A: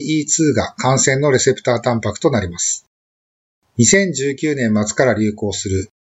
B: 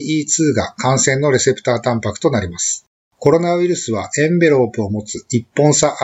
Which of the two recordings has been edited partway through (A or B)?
B